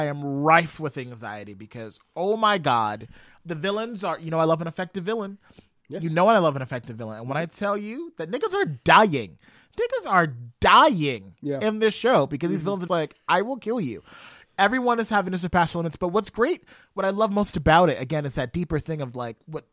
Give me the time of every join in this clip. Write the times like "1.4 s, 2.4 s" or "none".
12.9 s